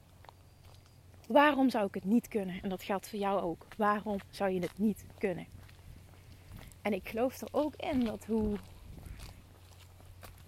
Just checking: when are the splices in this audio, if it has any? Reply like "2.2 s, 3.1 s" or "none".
none

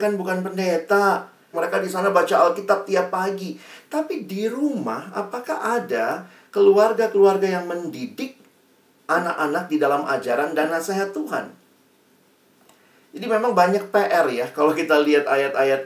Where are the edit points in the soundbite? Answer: 1.5 s

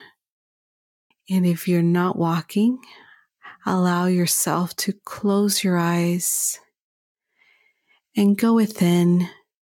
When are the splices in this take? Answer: 1.1 s

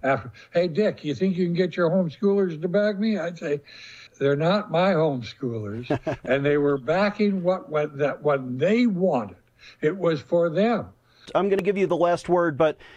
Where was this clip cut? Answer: 4.1 s, 11.3 s

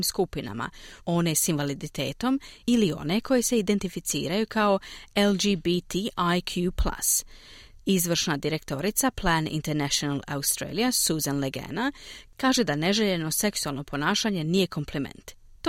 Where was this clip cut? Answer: 1.0 s, 7.8 s

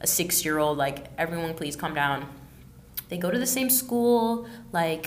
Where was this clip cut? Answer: 3.1 s

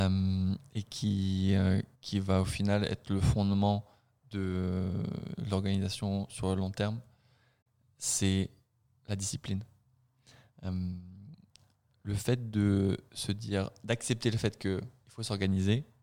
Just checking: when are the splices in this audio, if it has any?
1.9 s

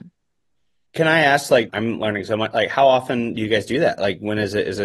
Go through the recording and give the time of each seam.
1.7 s

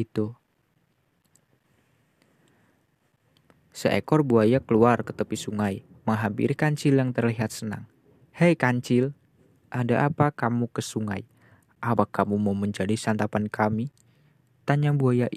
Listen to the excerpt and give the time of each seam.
none

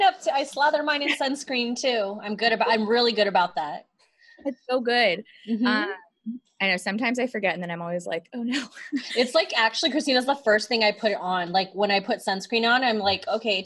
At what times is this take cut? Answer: none

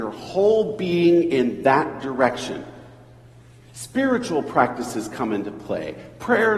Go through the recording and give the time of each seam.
none

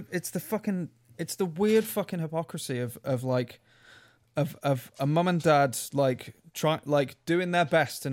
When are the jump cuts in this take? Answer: none

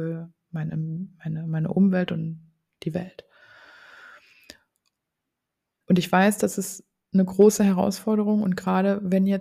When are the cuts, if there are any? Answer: 5.8 s

